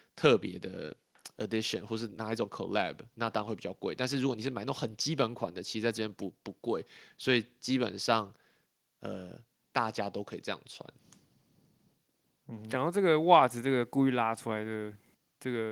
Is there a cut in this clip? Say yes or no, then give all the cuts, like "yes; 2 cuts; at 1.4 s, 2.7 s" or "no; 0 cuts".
no; 0 cuts